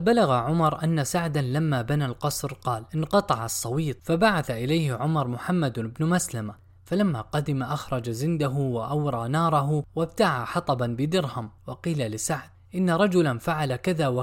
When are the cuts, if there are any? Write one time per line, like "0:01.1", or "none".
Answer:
none